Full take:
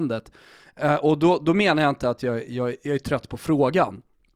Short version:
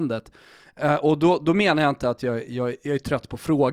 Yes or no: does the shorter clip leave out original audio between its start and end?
no